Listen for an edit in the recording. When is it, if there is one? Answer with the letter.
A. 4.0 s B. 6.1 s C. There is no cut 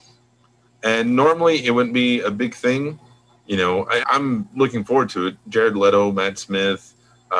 A